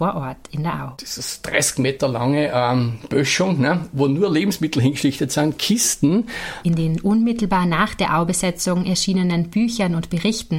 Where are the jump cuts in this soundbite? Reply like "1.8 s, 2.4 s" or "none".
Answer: 6.6 s